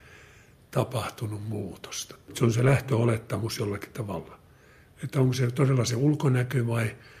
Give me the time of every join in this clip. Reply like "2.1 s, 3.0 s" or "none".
2.3 s, 4.8 s